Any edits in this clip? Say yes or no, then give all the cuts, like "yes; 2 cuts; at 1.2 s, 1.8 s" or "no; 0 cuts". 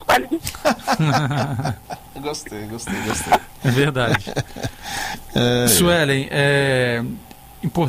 no; 0 cuts